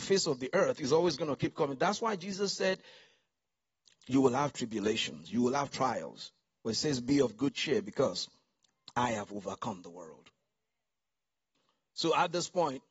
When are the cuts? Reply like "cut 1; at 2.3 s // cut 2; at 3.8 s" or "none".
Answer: cut 1; at 4.0 s